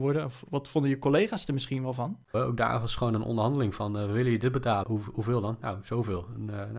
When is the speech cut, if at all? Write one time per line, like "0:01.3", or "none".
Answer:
0:02.3
0:04.8